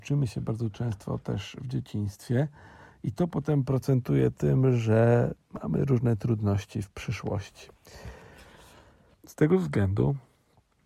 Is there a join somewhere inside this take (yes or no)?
yes